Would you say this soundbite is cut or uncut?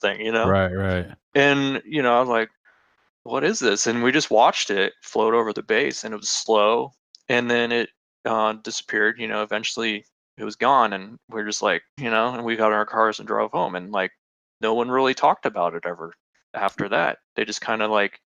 cut